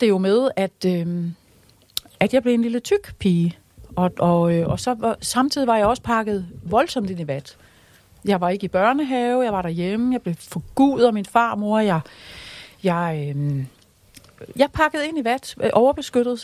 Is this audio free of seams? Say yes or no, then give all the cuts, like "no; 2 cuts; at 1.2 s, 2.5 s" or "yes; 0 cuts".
yes; 0 cuts